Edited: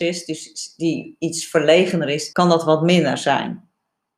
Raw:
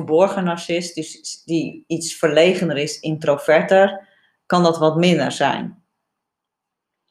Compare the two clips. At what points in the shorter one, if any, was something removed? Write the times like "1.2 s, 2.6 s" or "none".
2.3 s